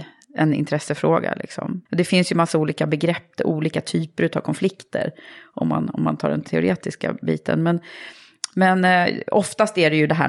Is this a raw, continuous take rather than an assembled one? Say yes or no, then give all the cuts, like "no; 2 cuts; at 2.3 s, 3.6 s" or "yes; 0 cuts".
no; 1 cut; at 1.9 s